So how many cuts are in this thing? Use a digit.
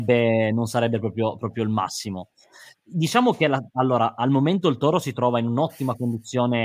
1